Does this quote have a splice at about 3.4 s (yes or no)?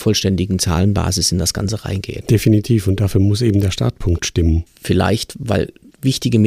no